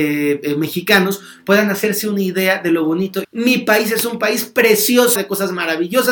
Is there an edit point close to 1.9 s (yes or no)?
no